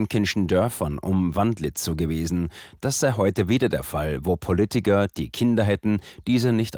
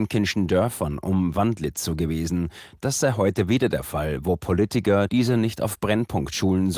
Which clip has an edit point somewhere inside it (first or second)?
second